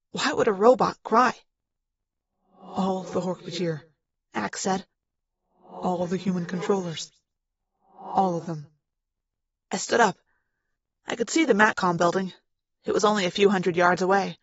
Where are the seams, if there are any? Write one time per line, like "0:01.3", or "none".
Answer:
none